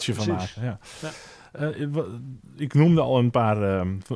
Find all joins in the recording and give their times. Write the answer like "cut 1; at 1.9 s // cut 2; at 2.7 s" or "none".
none